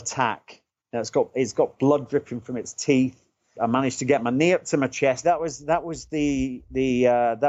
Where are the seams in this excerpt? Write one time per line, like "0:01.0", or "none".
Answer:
0:03.5
0:05.2